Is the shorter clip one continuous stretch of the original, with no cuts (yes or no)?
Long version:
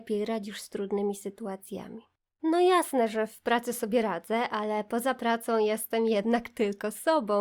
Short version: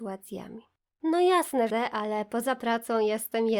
no